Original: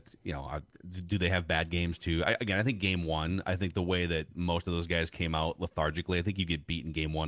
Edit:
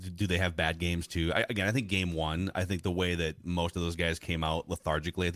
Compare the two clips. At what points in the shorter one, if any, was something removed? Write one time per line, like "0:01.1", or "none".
none